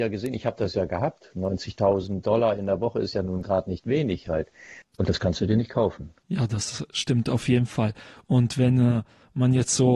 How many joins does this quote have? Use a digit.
2